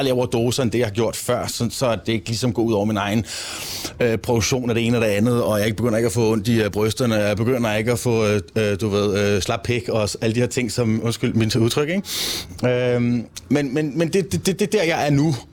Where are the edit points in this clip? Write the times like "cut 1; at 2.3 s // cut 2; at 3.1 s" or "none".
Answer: none